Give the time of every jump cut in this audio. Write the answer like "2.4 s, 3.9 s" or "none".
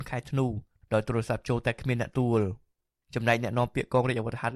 2.1 s